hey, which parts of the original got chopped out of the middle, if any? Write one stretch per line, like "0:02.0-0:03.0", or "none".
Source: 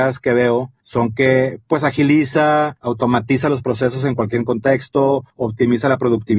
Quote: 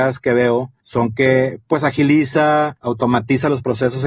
none